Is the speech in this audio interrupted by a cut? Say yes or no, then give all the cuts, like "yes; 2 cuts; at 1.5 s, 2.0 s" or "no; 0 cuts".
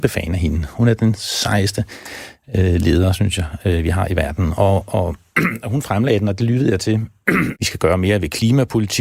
yes; 1 cut; at 7.5 s